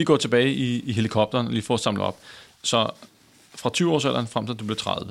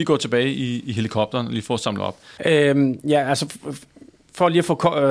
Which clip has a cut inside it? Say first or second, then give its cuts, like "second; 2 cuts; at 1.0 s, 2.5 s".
second; 1 cut; at 2.4 s